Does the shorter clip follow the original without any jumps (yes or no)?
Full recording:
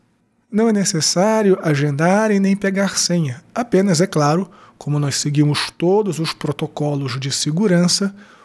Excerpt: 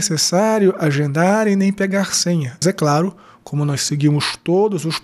no